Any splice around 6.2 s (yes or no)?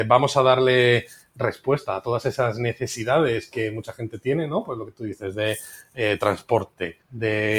no